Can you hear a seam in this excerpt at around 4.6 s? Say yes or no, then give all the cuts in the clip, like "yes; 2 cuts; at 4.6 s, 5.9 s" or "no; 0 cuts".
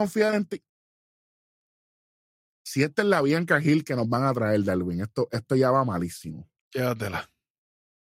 no; 0 cuts